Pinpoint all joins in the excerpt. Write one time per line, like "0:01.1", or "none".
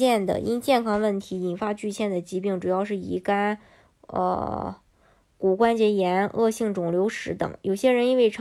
none